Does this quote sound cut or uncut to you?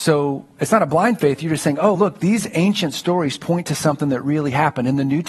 uncut